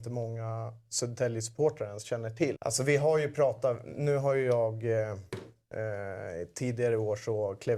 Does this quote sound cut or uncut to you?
cut